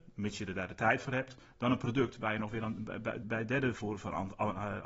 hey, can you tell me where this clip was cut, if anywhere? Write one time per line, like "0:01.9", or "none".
0:03.2